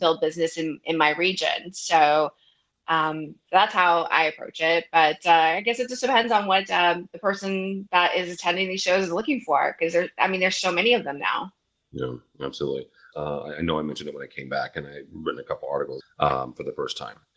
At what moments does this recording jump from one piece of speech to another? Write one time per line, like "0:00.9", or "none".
0:13.1
0:16.0